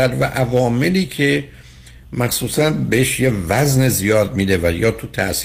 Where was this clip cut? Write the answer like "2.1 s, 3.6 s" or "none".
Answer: none

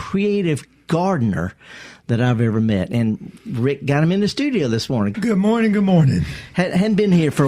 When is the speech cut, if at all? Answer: 5.1 s

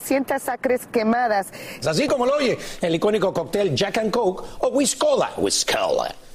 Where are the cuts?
1.8 s

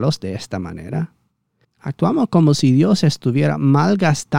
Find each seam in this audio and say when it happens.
1.6 s

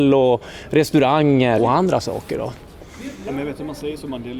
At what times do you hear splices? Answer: 1.6 s

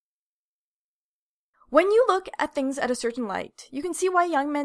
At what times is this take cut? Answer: 1.5 s

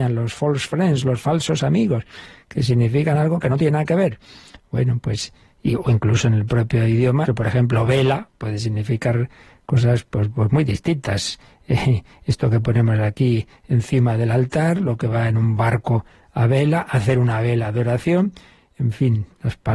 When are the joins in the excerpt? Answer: 7.3 s, 8.3 s

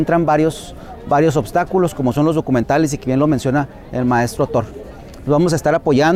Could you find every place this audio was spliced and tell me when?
none

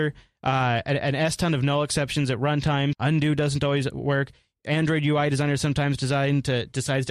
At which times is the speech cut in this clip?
2.9 s

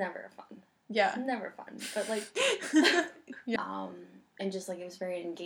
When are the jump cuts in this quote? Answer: 3.6 s

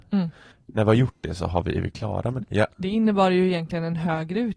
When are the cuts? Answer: 2.4 s

